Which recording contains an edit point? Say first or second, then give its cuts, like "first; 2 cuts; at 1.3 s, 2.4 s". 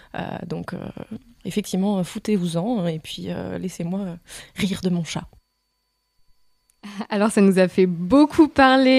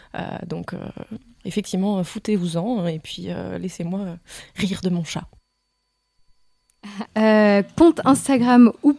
second; 1 cut; at 7.1 s